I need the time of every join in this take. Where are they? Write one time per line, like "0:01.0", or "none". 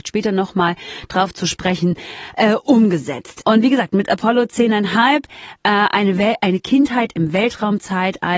0:03.4